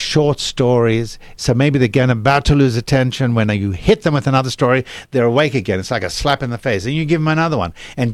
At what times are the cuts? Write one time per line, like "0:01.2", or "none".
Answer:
0:01.4